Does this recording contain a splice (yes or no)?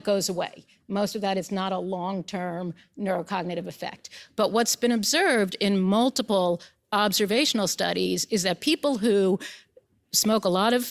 no